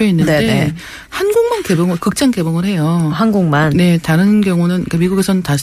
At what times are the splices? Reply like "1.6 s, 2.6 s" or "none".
none